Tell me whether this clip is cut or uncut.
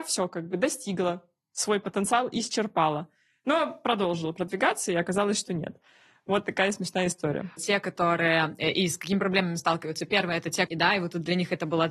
cut